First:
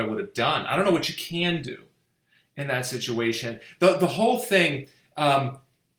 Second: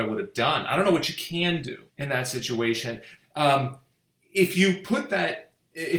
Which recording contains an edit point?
second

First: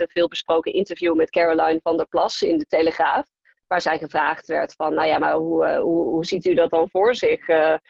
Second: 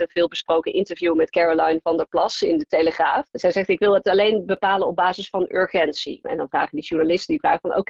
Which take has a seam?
second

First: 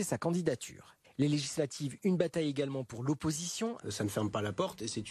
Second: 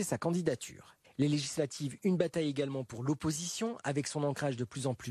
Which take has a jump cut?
first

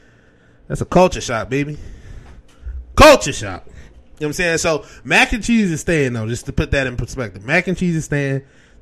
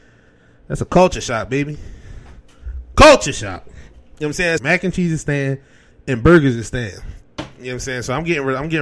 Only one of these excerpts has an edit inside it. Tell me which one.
second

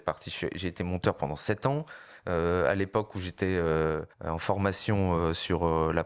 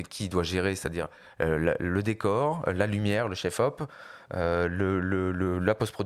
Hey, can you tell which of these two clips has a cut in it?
first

